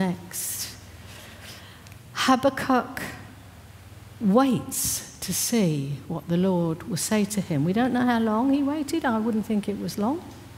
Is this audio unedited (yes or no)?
yes